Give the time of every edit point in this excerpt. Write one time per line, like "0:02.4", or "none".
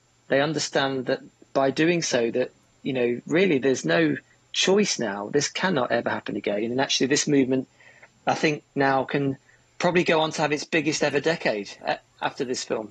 0:11.8